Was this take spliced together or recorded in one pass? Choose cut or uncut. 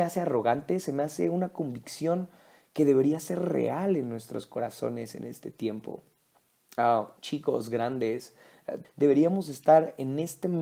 cut